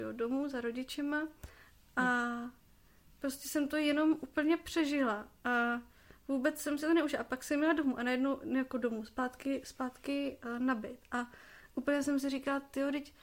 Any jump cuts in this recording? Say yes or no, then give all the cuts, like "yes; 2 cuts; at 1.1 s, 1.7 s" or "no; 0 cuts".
no; 0 cuts